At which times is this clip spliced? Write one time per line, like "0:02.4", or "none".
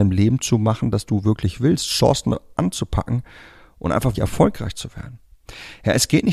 0:04.1